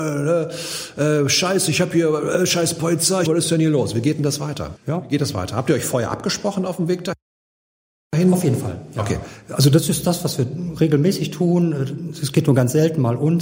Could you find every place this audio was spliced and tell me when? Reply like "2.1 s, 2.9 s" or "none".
3.2 s, 4.8 s